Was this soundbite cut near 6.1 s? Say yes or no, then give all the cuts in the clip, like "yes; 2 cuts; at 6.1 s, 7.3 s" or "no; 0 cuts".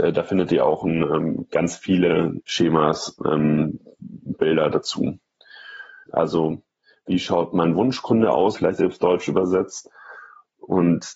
yes; 3 cuts; at 2.4 s, 6.1 s, 8.5 s